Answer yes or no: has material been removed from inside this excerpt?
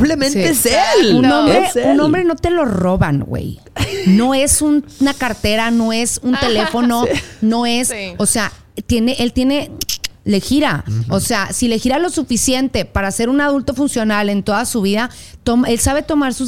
no